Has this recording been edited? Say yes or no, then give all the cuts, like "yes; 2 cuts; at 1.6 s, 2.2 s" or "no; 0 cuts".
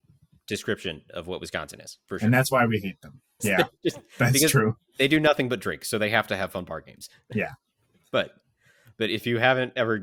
yes; 1 cut; at 3.4 s